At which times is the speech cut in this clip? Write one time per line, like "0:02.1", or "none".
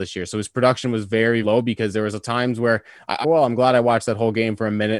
0:01.4
0:03.2